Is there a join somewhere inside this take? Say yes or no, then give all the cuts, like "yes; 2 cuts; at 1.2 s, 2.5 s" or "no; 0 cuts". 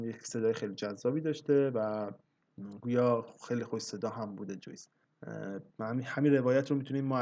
no; 0 cuts